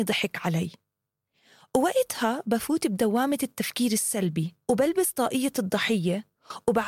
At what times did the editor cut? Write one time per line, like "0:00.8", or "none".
0:04.6